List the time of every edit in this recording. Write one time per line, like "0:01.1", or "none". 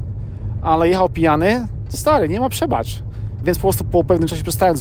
0:03.4